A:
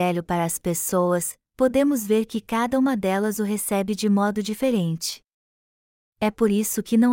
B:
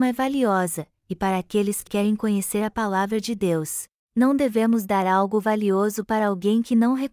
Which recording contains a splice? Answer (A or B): B